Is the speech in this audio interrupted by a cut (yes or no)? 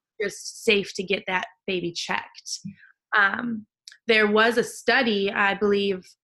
no